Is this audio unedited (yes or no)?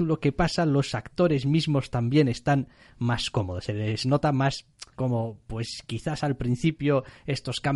no